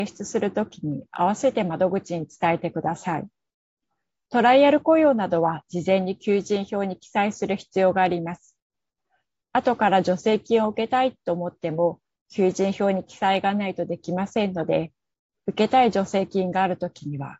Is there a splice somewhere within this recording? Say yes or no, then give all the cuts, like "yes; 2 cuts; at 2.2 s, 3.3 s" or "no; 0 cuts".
no; 0 cuts